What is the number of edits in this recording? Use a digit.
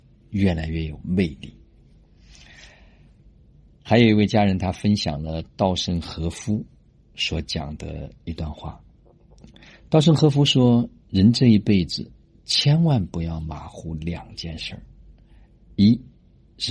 0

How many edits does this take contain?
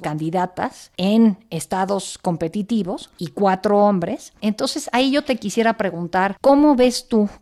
1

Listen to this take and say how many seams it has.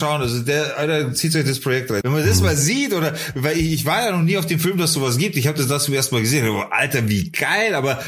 1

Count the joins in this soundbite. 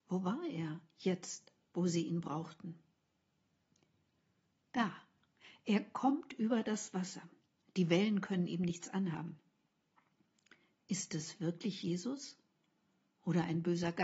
0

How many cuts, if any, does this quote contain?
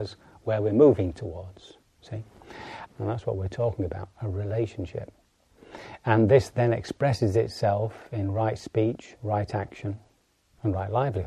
1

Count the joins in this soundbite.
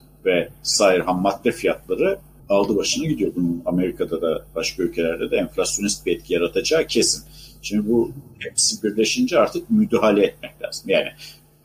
0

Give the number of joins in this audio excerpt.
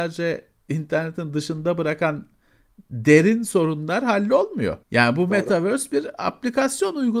1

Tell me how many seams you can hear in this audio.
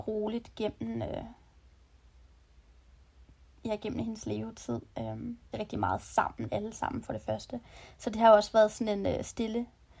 1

